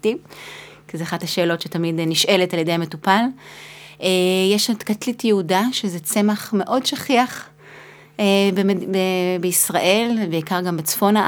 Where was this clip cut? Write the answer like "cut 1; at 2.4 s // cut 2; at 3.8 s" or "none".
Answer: none